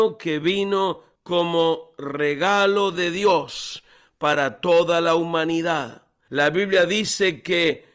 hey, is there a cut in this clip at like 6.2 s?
yes; 1 cut; at 6.2 s

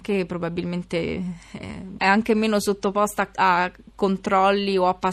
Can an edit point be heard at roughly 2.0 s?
yes; 1 cut; at 2.0 s

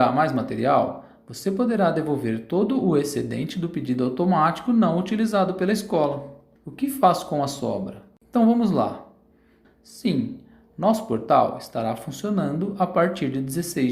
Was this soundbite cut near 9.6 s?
yes; 2 cuts; at 6.6 s, 9.6 s

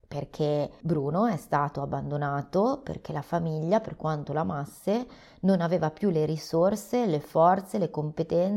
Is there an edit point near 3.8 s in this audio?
no; 0 cuts

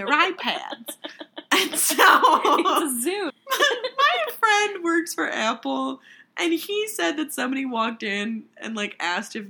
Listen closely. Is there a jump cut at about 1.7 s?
no; 1 cut; at 3.3 s

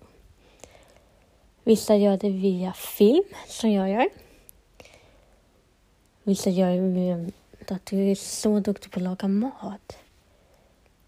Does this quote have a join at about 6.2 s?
no; 1 cut; at 7.7 s

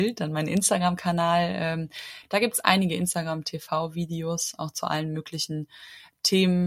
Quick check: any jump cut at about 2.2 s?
no; 0 cuts

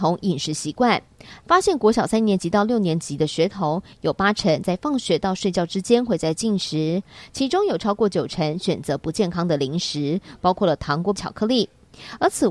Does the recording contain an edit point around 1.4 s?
yes; 2 cuts; at 1.4 s, 11.2 s

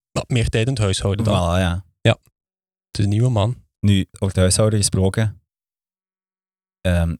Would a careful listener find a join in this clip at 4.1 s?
yes; 1 cut; at 4.1 s

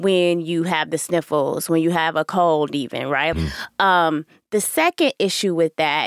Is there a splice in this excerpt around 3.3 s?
yes; 1 cut; at 3.3 s

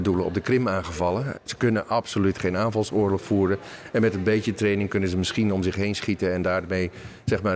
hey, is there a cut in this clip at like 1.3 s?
yes; 1 cut; at 1.3 s

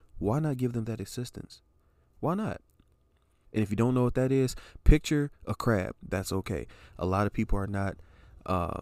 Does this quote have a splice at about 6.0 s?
yes; 2 cuts; at 3.4 s, 6.0 s

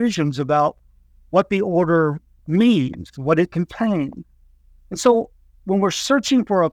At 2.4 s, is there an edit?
yes; 1 cut; at 2.4 s

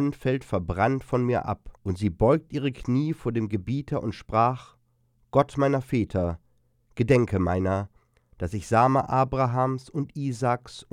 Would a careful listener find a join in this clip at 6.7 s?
no; 1 cut; at 1.8 s

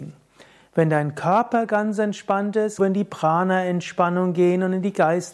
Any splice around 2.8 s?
yes; 1 cut; at 2.8 s

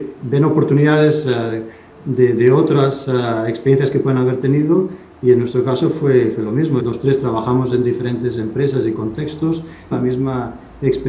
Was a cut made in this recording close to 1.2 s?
no; 2 cuts; at 6.8 s, 9.9 s

